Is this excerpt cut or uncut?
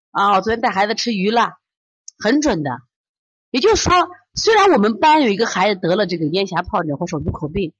uncut